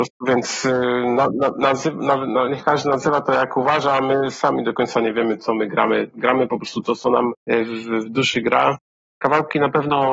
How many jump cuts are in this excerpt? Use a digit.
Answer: 1